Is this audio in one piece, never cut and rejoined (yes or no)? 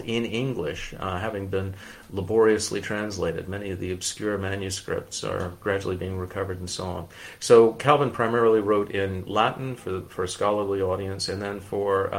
yes